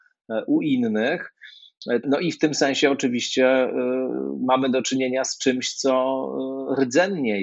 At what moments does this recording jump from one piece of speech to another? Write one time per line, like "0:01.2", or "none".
0:02.0